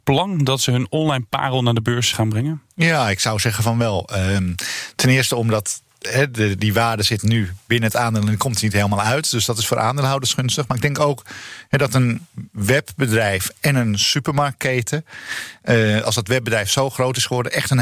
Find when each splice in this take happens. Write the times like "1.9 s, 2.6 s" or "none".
2.1 s